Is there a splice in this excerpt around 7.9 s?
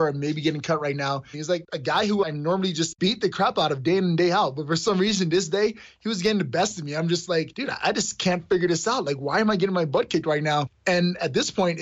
no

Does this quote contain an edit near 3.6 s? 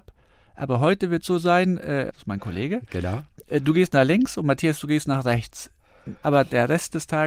no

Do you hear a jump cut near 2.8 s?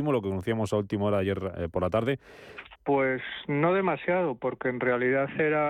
yes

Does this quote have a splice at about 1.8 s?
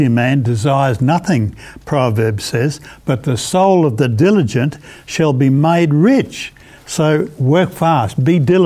no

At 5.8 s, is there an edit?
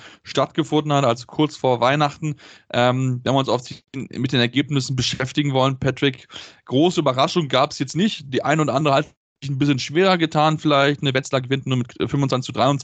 no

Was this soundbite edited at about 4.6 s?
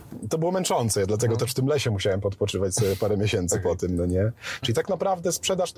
yes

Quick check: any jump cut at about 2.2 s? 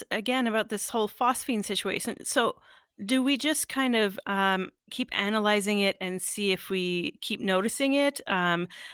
no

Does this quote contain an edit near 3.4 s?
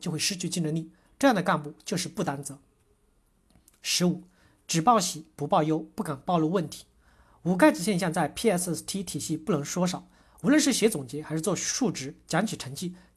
no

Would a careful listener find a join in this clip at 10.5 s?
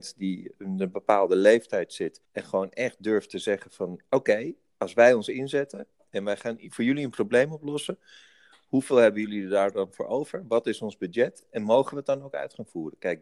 no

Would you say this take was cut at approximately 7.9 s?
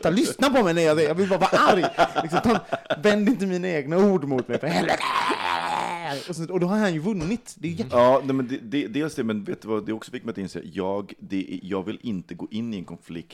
yes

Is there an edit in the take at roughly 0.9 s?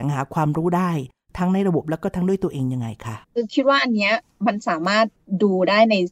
no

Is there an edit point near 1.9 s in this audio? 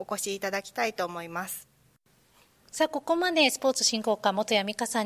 no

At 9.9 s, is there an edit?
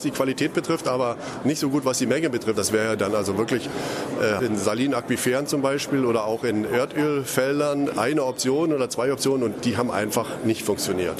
no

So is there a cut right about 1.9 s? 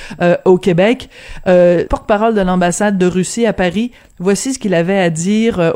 yes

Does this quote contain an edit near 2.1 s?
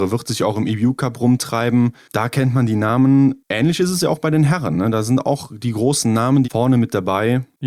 no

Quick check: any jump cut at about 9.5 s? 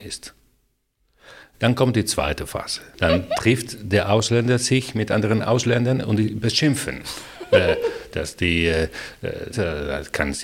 yes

